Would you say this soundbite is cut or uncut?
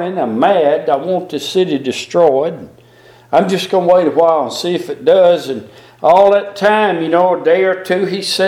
uncut